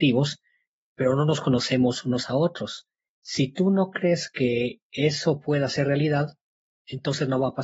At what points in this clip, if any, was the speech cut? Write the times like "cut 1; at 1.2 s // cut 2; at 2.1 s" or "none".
cut 1; at 3.2 s